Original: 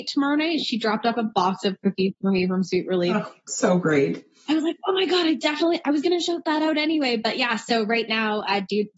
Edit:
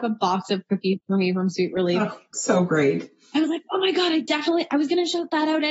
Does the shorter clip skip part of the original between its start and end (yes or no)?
no